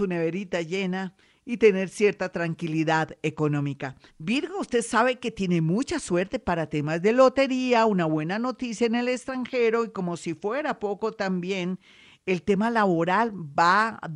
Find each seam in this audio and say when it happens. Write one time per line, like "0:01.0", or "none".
0:04.1